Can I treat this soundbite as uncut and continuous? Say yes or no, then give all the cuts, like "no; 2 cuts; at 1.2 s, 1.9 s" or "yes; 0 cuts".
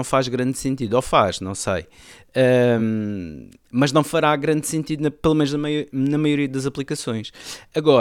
yes; 0 cuts